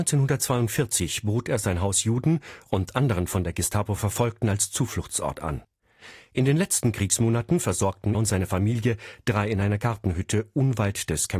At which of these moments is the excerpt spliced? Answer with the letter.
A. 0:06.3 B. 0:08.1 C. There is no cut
B